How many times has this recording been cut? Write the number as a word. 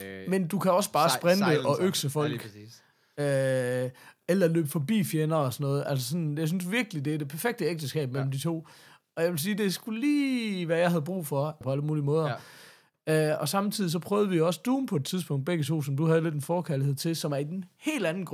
one